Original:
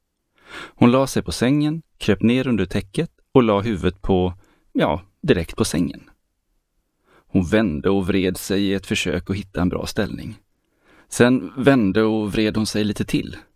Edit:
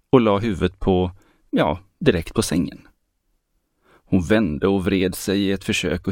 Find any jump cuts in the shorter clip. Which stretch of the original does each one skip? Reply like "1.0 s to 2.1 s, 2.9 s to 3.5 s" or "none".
none